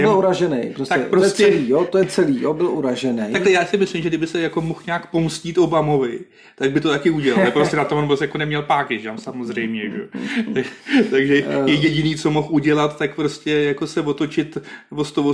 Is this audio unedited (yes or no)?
yes